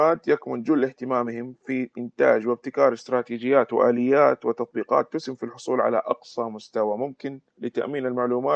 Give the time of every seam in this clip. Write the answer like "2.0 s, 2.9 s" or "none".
7.5 s